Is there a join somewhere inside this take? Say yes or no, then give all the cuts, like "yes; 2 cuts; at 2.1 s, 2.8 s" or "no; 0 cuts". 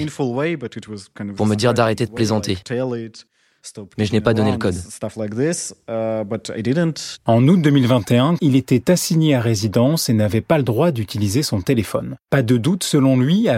yes; 3 cuts; at 7.2 s, 8.4 s, 12.2 s